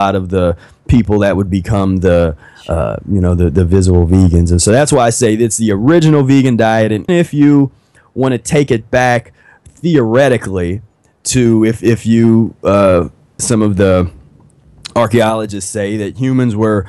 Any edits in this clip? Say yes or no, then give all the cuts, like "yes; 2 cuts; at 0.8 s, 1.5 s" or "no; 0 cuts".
yes; 2 cuts; at 7.1 s, 13.4 s